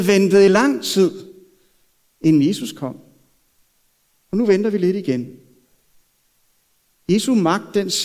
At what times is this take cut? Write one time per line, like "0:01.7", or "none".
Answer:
none